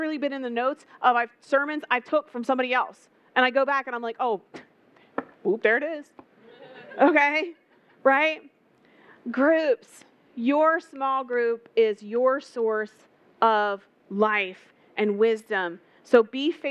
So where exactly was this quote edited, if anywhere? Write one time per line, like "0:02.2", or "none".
none